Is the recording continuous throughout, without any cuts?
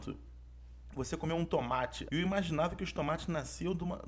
no; 1 cut; at 2.1 s

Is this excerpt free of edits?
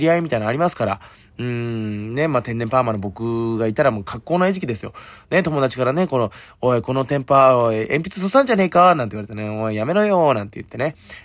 yes; 0 cuts

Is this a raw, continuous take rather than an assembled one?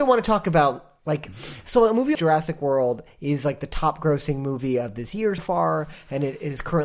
no; 2 cuts; at 2.2 s, 5.4 s

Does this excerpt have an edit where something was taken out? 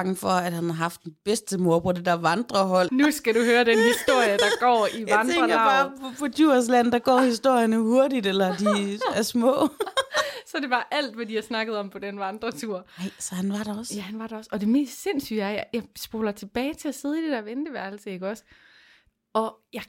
yes; 1 cut; at 2.9 s

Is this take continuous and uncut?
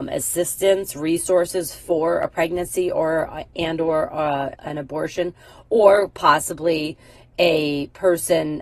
no; 1 cut; at 4.5 s

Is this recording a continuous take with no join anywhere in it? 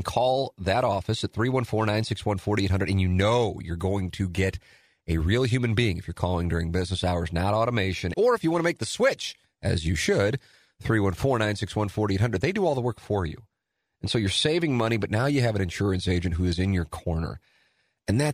no; 1 cut; at 8.1 s

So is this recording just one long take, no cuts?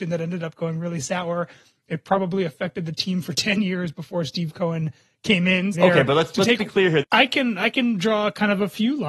no; 2 cuts; at 5.7 s, 7.0 s

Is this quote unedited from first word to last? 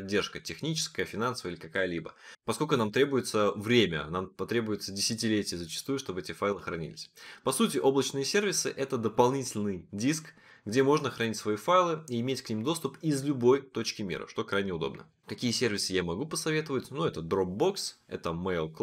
yes; 0 cuts

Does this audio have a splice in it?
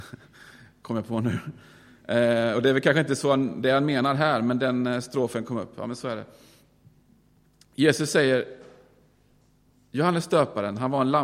no; 0 cuts

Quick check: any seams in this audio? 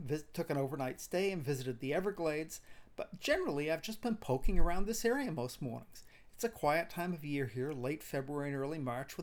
no; 0 cuts

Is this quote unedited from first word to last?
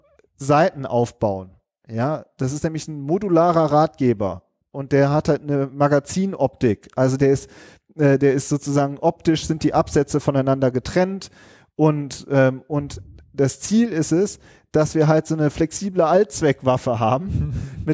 yes; 0 cuts

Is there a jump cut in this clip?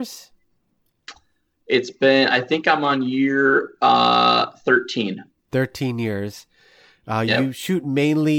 no; 0 cuts

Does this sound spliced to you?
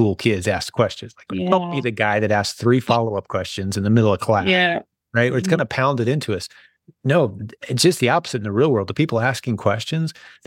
yes; 1 cut; at 1.3 s

